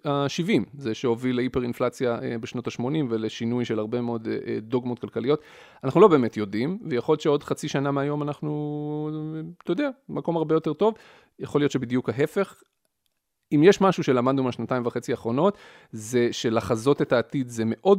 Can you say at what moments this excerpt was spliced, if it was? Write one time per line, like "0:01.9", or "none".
none